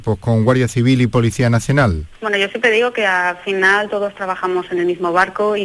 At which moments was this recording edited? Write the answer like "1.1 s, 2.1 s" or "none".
none